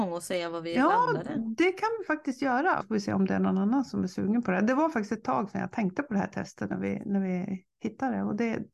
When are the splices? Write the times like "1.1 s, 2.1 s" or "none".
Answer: 2.8 s, 6.7 s

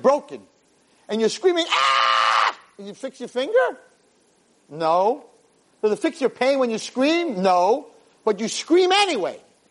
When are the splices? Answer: none

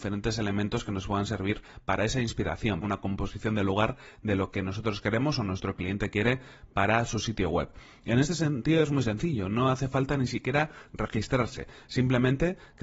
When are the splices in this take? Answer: 2.8 s

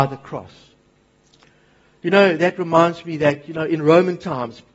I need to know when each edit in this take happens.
none

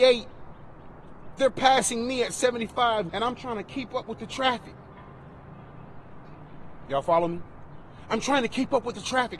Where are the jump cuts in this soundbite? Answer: 3.1 s

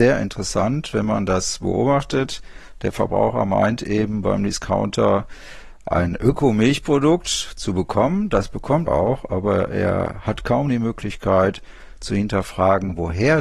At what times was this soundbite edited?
8.9 s

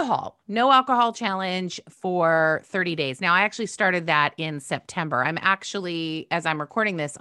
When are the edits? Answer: none

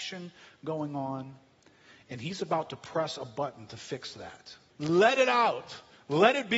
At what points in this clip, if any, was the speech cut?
4.7 s

